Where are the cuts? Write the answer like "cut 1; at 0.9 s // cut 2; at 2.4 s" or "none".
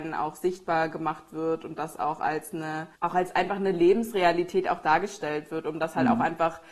cut 1; at 2.9 s